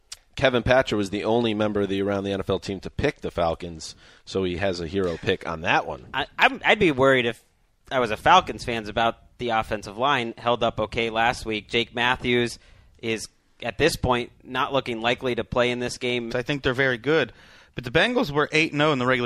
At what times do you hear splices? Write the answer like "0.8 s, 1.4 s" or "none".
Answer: 16.3 s